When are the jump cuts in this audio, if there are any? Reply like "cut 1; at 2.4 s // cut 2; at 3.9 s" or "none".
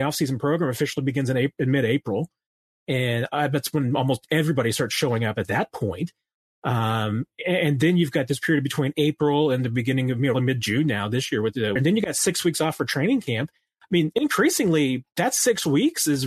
cut 1; at 10.3 s // cut 2; at 11.8 s